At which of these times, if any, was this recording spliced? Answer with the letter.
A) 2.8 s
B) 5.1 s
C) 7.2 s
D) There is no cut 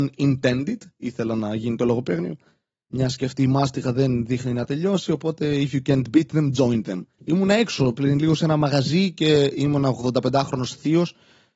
C